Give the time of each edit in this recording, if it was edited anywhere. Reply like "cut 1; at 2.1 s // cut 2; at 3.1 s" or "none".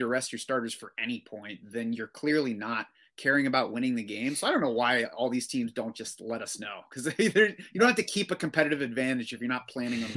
none

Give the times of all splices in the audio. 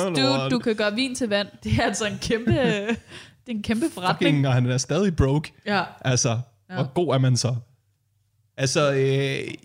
cut 1; at 1.6 s

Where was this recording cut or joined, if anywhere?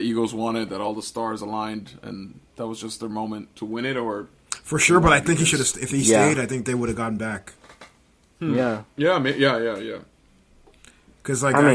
none

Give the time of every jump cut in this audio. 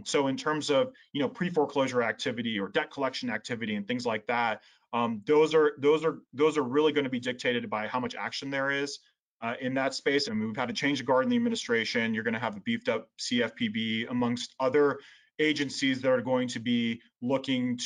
cut 1; at 10.3 s

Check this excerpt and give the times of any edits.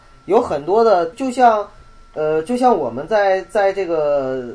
cut 1; at 1.1 s

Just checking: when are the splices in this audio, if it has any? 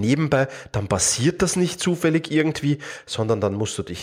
none

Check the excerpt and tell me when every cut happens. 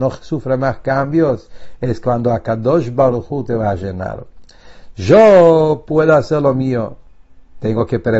none

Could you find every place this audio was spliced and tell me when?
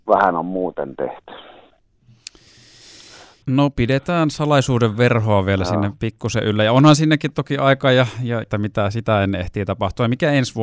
cut 1; at 3.4 s // cut 2; at 8.4 s

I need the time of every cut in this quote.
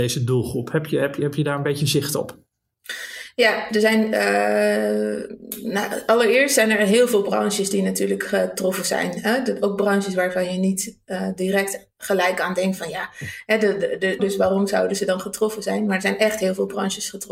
cut 1; at 14.2 s

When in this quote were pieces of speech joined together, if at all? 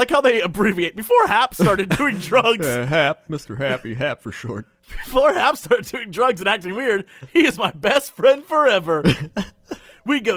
none

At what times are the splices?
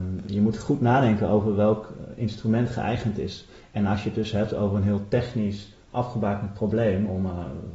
none

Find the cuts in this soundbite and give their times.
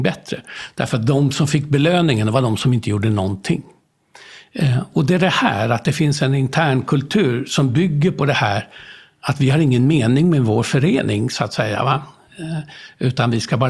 cut 1; at 4.9 s

